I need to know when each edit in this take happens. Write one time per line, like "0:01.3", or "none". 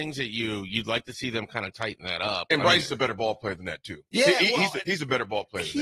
none